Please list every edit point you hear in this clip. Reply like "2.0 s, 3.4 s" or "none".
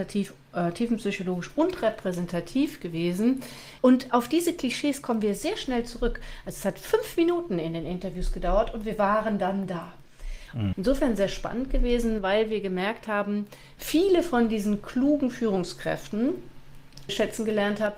3.8 s, 10.7 s, 17.1 s